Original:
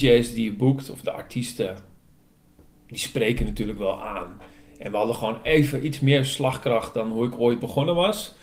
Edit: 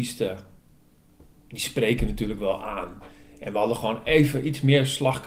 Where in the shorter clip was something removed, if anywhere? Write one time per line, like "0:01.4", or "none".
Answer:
none